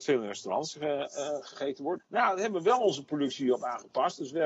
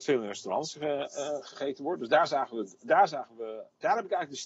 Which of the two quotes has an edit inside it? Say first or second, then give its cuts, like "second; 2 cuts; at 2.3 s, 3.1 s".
first; 1 cut; at 2.0 s